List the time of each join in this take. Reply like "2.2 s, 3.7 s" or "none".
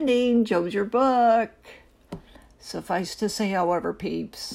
none